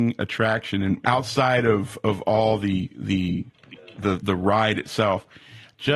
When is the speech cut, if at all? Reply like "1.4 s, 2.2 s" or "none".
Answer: 1.0 s, 4.2 s